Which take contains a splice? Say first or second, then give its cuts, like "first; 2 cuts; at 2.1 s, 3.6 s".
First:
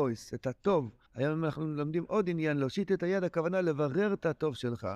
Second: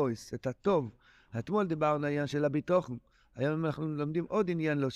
first; 1 cut; at 1.1 s